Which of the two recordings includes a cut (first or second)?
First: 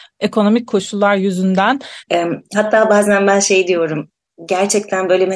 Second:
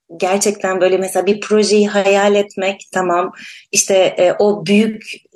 first